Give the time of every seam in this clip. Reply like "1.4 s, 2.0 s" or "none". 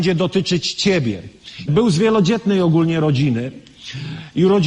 1.7 s